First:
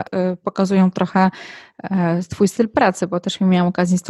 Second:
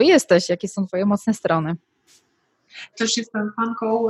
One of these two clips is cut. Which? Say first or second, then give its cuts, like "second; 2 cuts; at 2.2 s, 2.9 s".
second; 1 cut; at 2.9 s